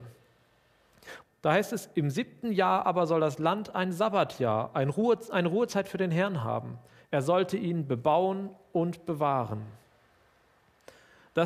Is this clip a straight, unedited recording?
no; 2 cuts; at 1.2 s, 7.0 s

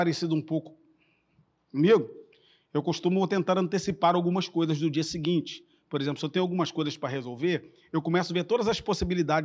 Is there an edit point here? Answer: no; 0 cuts

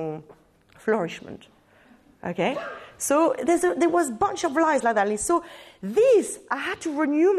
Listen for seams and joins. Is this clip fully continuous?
yes; 0 cuts

